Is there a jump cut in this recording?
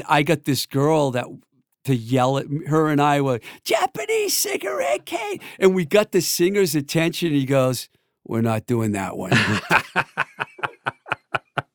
no; 0 cuts

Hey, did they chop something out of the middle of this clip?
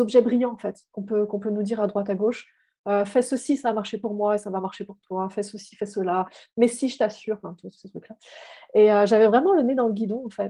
no; 0 cuts

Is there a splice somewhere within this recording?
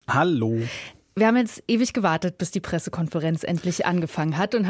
no; 0 cuts

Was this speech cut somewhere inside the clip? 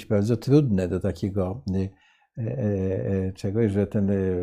no; 0 cuts

